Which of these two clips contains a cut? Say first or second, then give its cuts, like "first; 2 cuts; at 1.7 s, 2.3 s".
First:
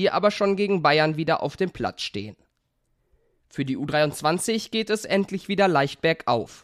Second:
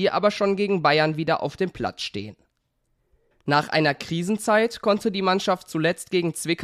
second; 1 cut; at 3.3 s